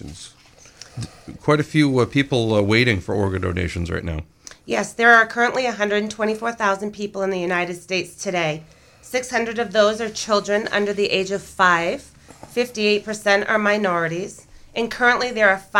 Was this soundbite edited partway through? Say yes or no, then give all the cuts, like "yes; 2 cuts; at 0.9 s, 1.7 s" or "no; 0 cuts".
no; 0 cuts